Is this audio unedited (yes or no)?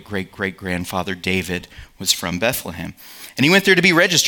yes